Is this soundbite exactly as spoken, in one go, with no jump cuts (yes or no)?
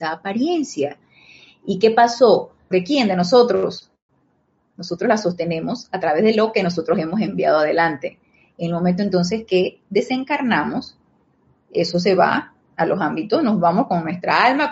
no